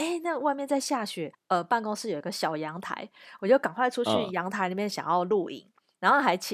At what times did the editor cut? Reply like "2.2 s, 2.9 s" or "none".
1.3 s